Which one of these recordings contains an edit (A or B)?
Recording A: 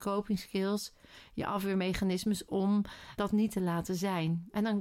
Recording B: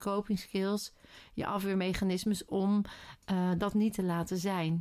A